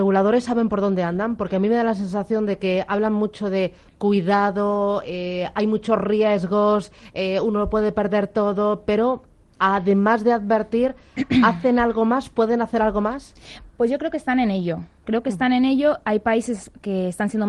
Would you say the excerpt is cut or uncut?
uncut